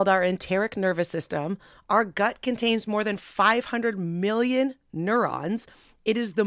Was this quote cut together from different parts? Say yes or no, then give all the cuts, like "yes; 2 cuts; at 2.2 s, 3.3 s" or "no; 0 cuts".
no; 0 cuts